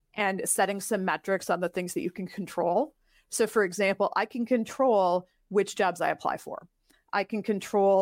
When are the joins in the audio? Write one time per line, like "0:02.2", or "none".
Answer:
none